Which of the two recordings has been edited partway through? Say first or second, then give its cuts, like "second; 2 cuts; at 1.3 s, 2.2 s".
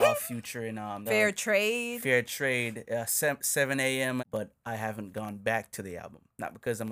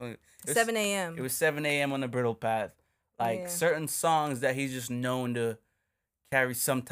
first; 2 cuts; at 1.1 s, 4.2 s